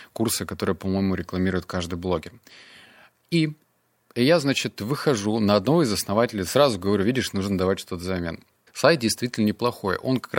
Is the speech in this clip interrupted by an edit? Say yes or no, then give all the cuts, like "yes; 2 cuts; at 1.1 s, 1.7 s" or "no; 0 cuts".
yes; 1 cut; at 8.7 s